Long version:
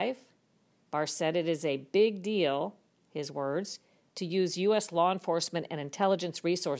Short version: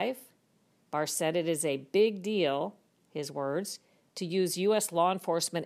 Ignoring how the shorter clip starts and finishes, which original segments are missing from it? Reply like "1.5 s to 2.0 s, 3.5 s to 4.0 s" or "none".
none